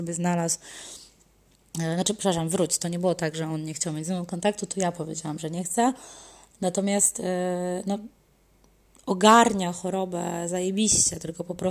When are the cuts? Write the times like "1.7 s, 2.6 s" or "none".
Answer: none